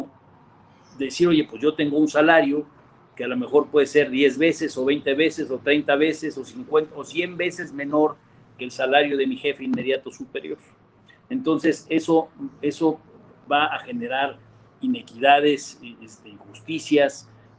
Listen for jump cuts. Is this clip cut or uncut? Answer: uncut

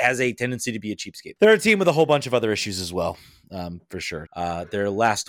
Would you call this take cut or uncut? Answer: cut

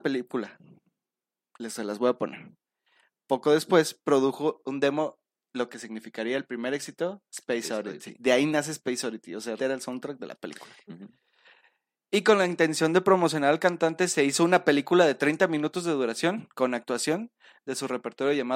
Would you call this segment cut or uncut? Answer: cut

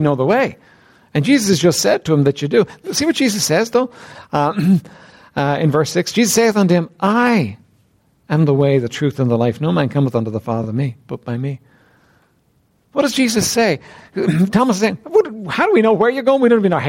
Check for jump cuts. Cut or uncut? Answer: uncut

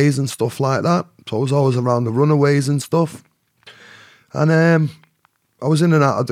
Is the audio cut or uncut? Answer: uncut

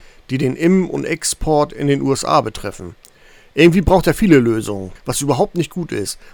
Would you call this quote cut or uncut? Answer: cut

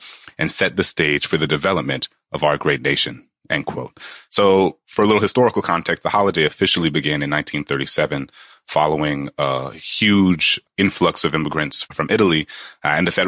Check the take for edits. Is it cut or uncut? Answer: cut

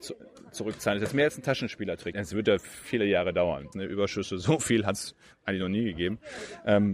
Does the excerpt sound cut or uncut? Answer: cut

